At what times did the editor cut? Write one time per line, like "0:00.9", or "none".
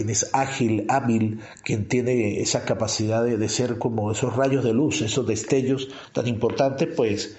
none